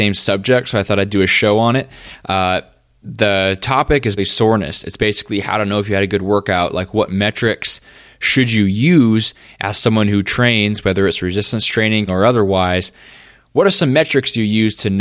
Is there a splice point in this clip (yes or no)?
yes